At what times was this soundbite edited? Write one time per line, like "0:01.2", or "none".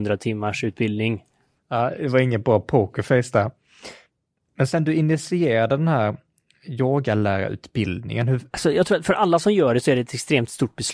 0:01.6
0:08.5